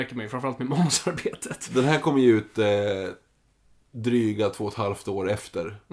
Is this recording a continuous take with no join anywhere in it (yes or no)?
yes